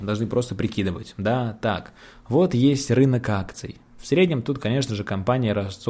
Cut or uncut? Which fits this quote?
uncut